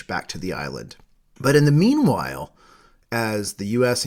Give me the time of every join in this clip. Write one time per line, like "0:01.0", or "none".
0:01.4